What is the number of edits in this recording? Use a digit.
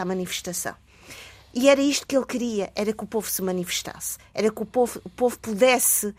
0